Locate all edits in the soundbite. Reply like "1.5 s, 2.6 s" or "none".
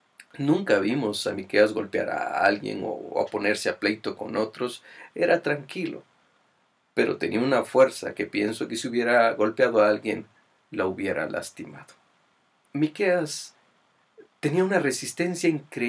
12.6 s